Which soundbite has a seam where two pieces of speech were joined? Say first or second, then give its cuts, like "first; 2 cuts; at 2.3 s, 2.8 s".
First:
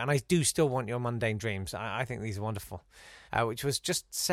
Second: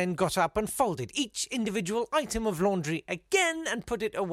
first; 1 cut; at 3.3 s